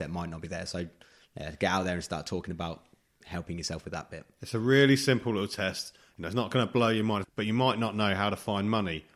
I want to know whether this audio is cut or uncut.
cut